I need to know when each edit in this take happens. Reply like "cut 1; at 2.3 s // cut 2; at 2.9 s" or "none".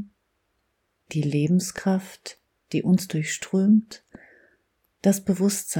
none